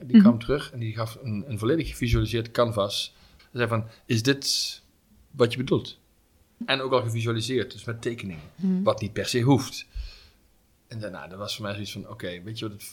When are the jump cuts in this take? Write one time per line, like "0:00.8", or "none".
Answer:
0:03.4
0:06.6